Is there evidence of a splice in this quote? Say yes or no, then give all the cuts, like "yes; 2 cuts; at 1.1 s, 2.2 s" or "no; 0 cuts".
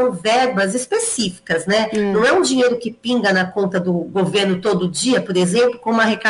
no; 0 cuts